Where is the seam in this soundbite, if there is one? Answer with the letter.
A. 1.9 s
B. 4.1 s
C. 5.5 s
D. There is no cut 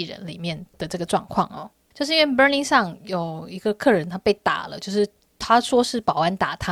A